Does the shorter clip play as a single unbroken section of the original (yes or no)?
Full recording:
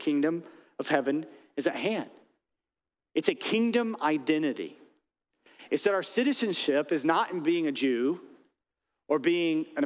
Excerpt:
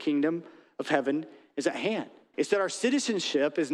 no